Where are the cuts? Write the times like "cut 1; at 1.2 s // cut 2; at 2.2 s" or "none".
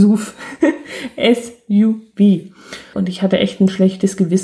cut 1; at 2.9 s